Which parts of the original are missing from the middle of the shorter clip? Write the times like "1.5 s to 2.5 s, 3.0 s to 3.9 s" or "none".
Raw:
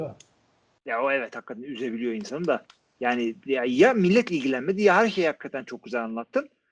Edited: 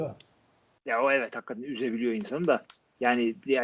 none